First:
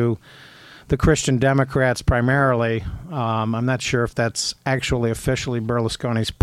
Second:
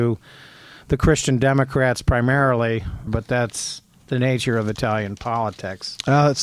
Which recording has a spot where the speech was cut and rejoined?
second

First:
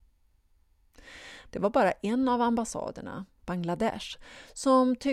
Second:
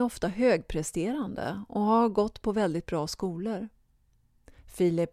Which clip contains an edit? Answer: first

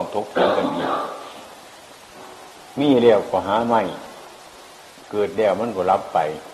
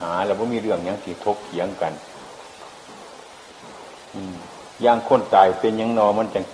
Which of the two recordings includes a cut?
second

